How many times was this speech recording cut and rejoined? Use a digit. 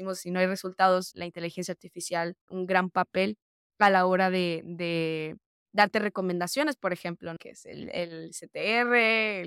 3